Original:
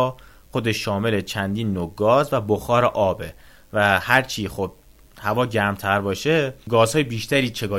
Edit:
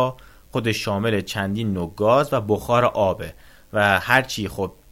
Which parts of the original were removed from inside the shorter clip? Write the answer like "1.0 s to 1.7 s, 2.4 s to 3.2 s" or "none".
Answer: none